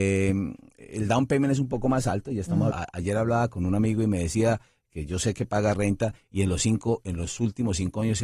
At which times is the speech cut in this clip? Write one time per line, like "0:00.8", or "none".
0:02.7